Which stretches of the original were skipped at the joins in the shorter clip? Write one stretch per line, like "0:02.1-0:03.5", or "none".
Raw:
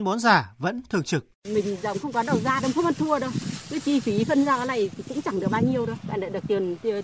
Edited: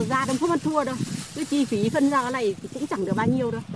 none